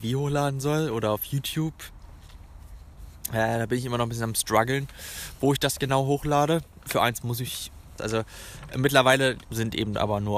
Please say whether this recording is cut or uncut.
cut